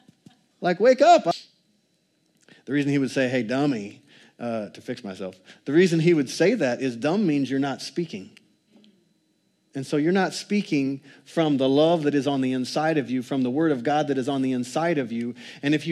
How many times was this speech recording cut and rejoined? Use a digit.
0